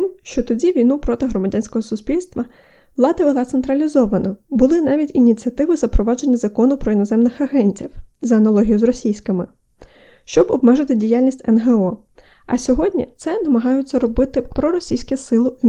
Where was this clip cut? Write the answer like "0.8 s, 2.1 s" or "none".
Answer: none